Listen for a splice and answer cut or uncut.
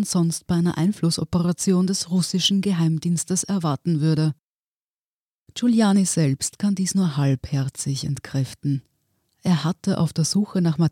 uncut